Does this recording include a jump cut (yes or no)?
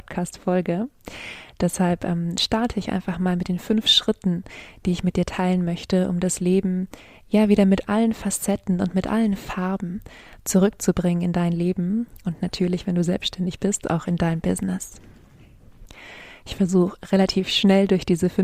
no